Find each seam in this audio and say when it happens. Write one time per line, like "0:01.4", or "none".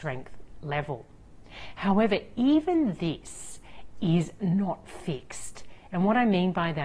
none